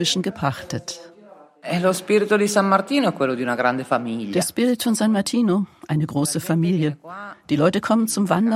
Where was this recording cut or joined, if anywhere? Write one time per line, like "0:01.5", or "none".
none